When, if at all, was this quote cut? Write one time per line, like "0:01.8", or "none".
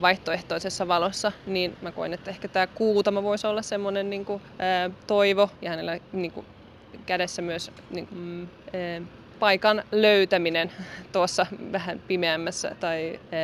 0:05.0
0:08.1